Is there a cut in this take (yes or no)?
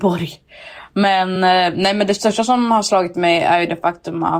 no